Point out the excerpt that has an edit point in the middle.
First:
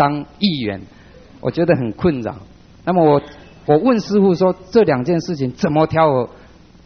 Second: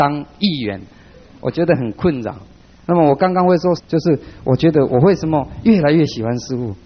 second; 2 cuts; at 2.6 s, 3.8 s

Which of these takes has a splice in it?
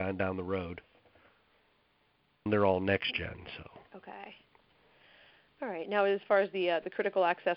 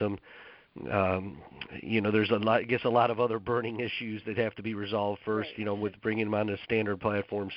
first; 2 cuts; at 2.5 s, 3.9 s

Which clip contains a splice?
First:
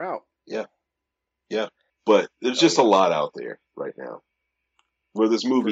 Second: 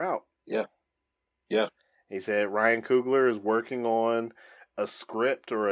first; 1 cut; at 1.9 s

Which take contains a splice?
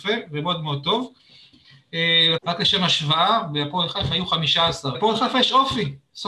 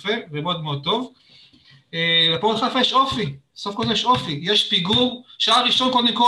first; 2 cuts; at 2.4 s, 4.9 s

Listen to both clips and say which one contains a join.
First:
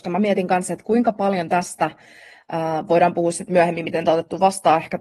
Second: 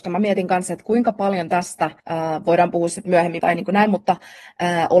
second; 2 cuts; at 2.0 s, 3.4 s

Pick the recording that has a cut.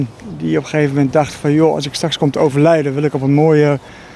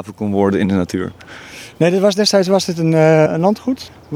second; 1 cut; at 3.3 s

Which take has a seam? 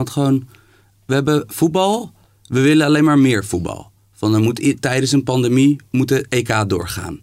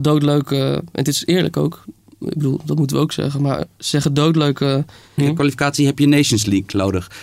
second; 1 cut; at 5.2 s

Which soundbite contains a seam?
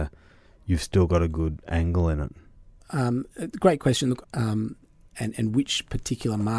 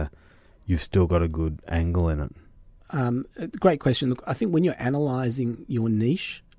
first; 1 cut; at 4.2 s

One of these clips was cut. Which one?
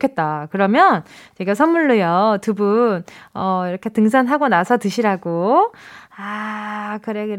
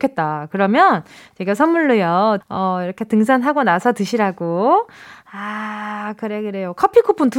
second; 1 cut; at 2.4 s

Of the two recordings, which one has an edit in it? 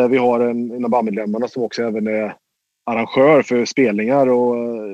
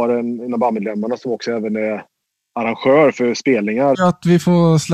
second; 1 cut; at 3.9 s

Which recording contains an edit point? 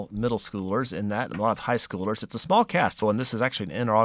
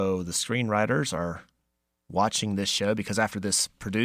first; 1 cut; at 3.0 s

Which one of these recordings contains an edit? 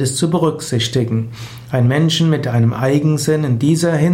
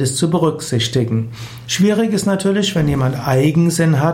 second; 1 cut; at 1.7 s

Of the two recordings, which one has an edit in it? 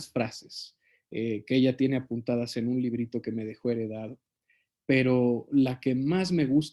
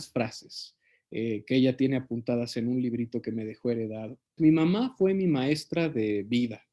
second; 1 cut; at 4.4 s

